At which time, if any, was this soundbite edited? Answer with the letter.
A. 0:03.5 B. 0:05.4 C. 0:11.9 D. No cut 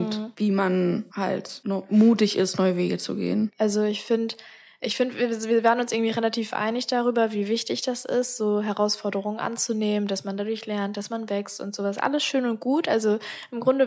A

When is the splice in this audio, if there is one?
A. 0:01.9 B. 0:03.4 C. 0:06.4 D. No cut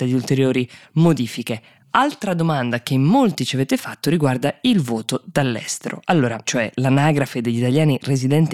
C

